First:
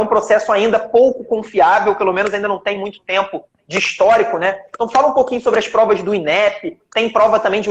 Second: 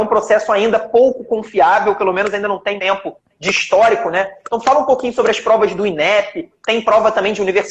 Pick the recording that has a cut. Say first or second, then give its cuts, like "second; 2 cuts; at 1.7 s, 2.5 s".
second; 1 cut; at 2.8 s